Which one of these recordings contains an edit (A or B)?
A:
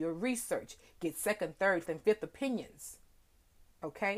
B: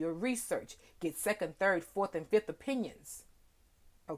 A